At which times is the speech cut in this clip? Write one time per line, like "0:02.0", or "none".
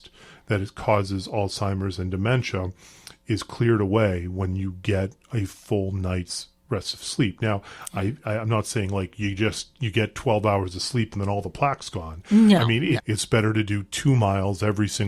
0:13.0